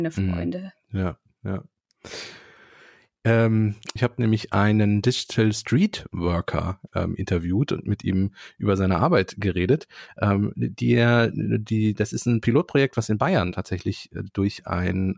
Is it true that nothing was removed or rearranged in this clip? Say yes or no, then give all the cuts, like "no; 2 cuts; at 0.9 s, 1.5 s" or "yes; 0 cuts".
no; 1 cut; at 4.0 s